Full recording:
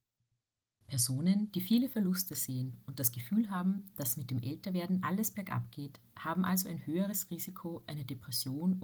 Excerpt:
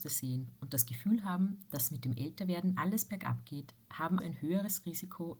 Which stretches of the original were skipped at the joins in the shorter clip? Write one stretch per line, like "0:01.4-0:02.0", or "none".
0:06.5-0:06.6